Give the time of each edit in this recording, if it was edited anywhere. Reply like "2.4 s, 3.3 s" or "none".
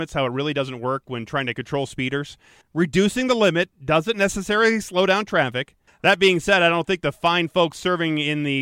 2.6 s, 5.9 s